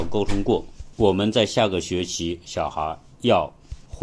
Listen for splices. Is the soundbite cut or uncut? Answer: uncut